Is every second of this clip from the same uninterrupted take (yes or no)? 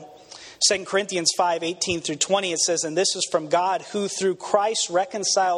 yes